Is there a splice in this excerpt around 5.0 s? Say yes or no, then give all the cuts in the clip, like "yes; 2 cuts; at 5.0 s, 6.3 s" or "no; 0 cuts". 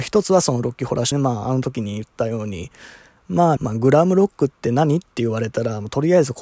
no; 2 cuts; at 1.1 s, 3.6 s